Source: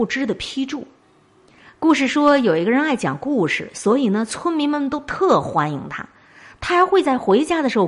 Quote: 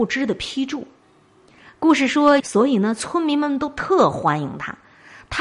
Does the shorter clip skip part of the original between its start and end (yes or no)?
yes